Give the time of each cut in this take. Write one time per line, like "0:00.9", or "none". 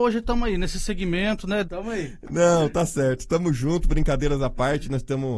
0:01.6

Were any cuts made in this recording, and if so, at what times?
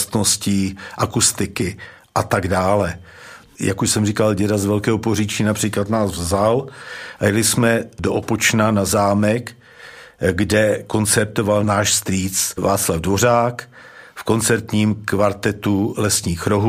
0:03.6

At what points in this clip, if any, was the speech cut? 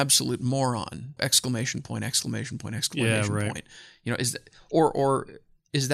0:01.2

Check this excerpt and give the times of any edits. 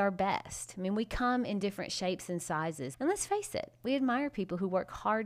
0:02.9

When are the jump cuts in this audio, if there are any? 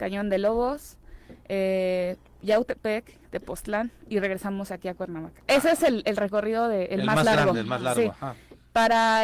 none

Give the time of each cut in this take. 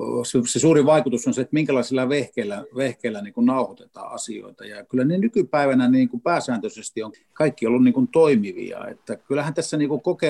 0:07.1

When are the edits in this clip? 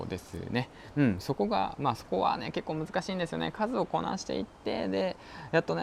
none

